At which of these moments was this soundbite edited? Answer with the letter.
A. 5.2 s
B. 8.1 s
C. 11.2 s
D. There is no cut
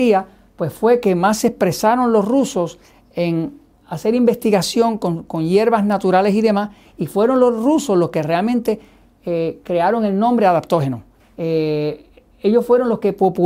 C